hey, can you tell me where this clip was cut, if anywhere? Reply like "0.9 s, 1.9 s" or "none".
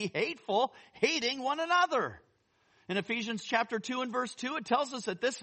none